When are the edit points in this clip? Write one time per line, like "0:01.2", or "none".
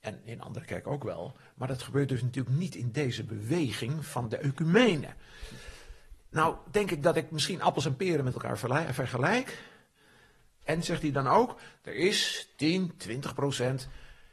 0:10.6